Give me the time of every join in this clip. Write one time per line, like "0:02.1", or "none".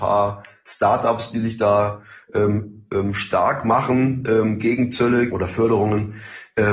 0:05.3